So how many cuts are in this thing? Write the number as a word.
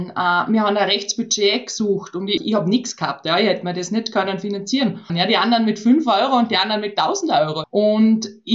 three